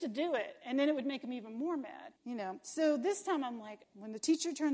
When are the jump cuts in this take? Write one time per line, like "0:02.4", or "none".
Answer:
0:02.2
0:03.8